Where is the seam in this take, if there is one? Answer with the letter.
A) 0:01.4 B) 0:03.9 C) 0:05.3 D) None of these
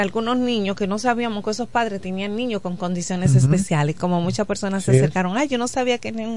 D